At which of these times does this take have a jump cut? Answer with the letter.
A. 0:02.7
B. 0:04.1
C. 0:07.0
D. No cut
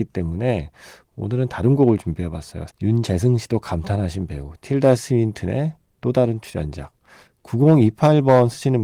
A